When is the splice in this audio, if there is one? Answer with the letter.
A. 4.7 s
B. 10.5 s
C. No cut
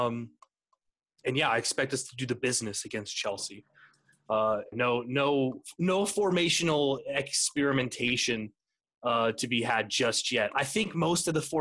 A